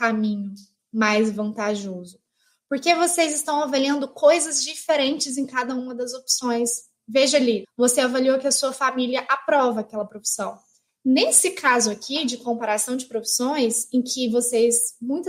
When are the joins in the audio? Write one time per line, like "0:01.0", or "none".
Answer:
0:07.6
0:10.9